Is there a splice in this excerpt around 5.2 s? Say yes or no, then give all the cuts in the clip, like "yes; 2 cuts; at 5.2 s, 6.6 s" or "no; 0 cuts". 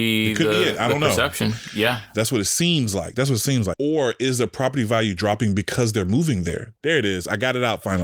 no; 3 cuts; at 2.1 s, 3.7 s, 6.8 s